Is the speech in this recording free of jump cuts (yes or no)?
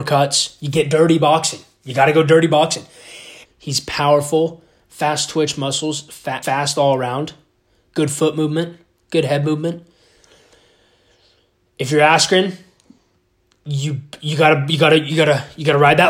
no